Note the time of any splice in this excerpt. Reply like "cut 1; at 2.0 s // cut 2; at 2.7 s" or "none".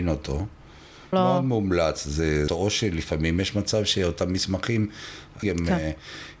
cut 1; at 1.1 s // cut 2; at 2.5 s // cut 3; at 5.4 s